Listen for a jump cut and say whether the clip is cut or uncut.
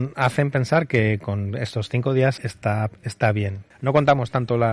cut